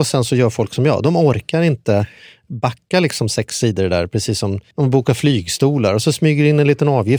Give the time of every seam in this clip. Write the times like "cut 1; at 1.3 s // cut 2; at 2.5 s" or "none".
cut 1; at 4.7 s